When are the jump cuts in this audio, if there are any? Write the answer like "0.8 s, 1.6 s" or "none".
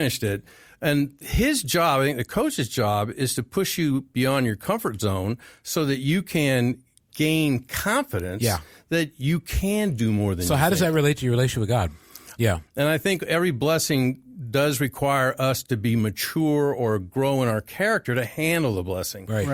12.4 s